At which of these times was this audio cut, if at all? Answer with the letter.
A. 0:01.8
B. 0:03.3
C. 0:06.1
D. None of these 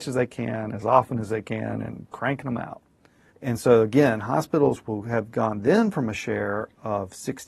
B